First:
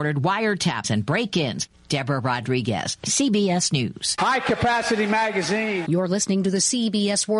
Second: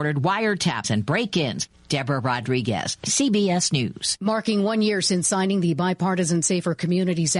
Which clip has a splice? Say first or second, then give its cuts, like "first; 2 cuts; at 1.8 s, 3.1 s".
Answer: first; 2 cuts; at 4.2 s, 5.8 s